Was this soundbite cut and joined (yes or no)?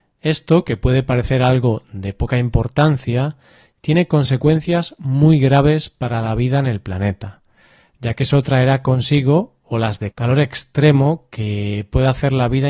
yes